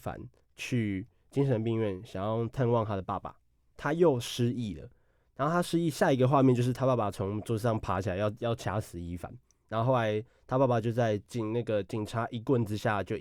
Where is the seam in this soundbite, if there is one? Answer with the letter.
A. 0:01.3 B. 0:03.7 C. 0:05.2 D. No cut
B